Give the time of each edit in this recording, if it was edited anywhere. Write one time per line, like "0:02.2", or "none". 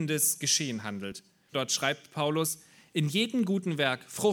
0:01.5